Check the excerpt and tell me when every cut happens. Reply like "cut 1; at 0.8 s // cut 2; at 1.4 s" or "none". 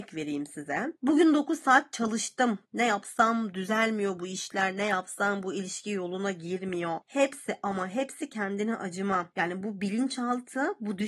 cut 1; at 2.6 s